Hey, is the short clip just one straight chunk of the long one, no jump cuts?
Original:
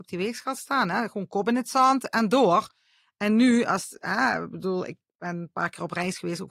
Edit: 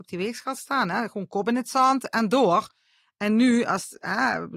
yes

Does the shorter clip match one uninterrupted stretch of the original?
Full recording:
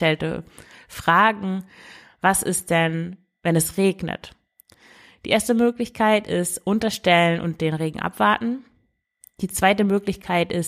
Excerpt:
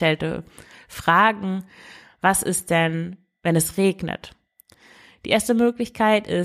yes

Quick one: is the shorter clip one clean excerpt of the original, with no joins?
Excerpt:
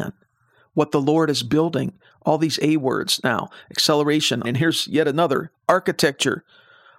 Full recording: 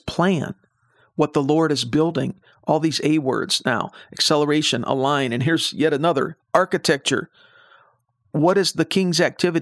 no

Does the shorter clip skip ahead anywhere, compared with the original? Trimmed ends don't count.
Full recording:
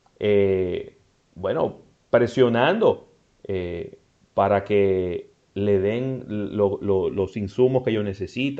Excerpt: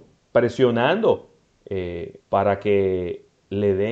yes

